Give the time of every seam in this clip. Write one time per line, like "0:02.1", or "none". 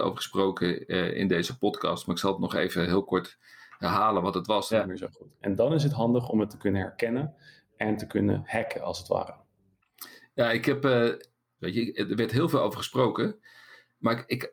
0:04.7
0:11.6